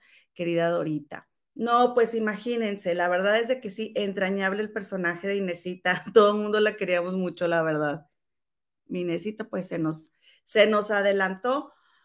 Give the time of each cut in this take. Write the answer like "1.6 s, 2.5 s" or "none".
none